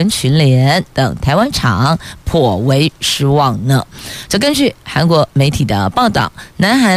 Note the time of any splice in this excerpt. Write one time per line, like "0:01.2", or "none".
none